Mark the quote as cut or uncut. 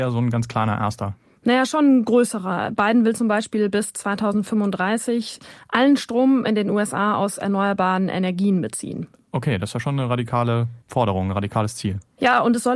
cut